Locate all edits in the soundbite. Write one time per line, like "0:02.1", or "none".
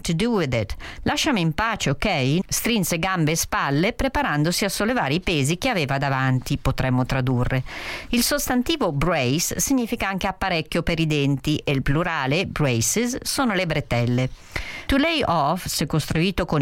0:02.4
0:14.9